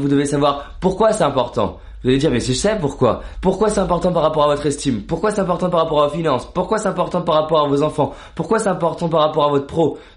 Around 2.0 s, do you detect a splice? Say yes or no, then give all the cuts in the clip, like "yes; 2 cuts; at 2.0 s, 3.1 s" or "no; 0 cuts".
no; 1 cut; at 3.3 s